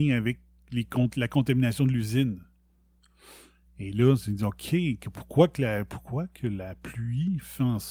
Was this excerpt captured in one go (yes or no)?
yes